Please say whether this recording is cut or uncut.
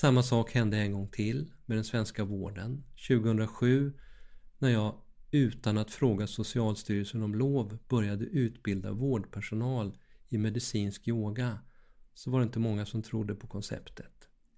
uncut